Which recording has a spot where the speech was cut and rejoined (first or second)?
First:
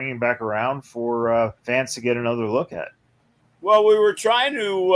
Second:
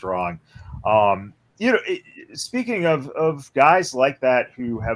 first